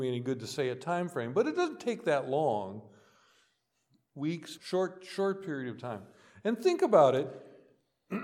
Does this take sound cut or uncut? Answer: cut